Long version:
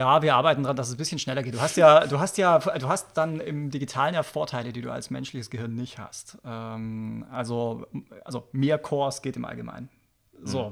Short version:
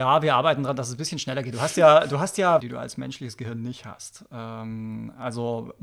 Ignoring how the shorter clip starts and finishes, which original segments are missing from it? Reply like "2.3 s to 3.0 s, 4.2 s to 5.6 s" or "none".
2.6 s to 4.7 s